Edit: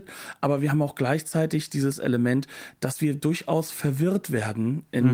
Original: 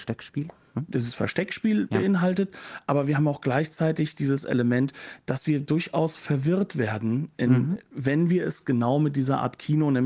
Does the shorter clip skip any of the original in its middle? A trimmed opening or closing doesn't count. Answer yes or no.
no